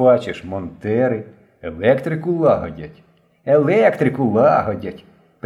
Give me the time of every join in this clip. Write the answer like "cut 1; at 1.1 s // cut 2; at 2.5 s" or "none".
none